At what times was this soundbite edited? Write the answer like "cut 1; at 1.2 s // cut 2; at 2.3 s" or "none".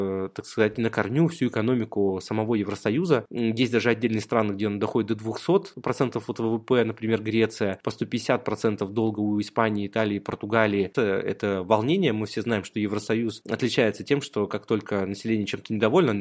cut 1; at 3.3 s // cut 2; at 10.9 s